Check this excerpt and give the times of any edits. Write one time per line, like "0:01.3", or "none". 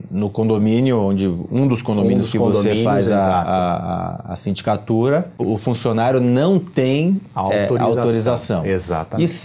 none